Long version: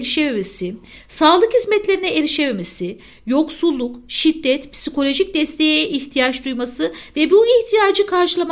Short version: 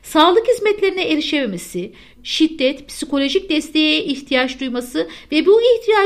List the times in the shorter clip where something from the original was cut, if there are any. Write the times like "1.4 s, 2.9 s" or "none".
2.2 s